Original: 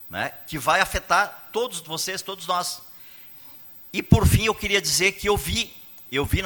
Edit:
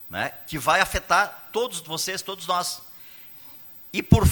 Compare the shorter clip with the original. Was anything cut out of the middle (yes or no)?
no